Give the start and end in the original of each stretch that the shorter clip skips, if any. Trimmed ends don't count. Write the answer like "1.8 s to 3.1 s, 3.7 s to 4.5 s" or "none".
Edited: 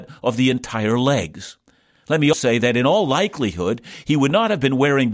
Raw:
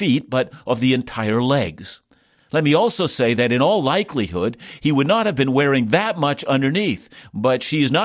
2.8 s to 3.1 s